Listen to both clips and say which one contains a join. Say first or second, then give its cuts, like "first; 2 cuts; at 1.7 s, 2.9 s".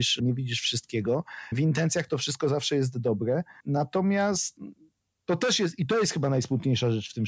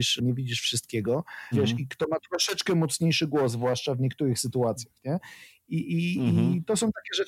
second; 1 cut; at 1.5 s